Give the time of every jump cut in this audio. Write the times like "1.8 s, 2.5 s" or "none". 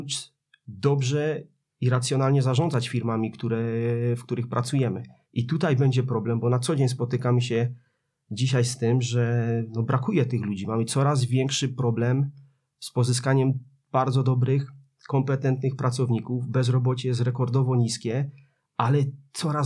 none